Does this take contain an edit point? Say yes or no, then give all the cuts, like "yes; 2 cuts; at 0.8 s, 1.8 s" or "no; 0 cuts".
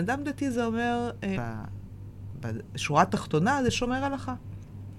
yes; 1 cut; at 1.3 s